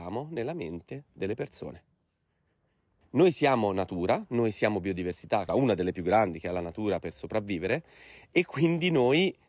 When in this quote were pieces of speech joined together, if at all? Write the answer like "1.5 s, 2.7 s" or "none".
3.0 s, 5.5 s